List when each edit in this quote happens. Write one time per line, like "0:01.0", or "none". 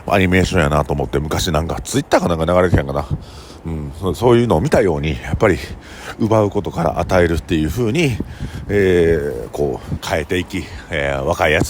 0:10.0